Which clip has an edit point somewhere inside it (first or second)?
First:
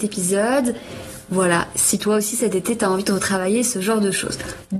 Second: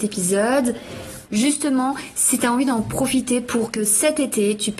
second